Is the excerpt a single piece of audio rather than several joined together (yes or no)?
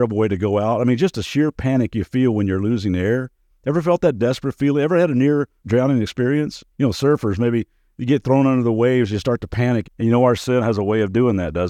no